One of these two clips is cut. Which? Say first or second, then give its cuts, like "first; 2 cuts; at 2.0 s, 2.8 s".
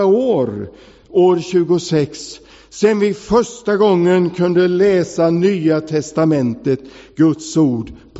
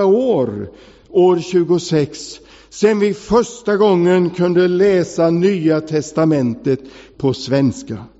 second; 1 cut; at 7.1 s